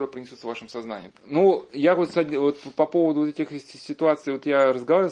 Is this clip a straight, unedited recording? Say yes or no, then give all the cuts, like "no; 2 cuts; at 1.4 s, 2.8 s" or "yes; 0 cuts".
no; 1 cut; at 1.1 s